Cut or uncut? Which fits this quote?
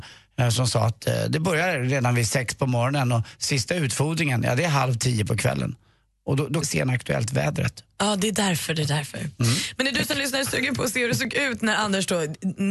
cut